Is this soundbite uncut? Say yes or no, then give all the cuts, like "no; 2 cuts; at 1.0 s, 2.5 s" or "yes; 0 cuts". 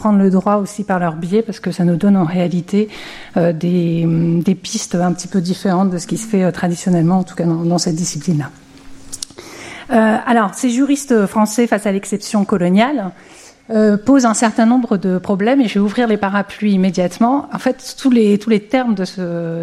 yes; 0 cuts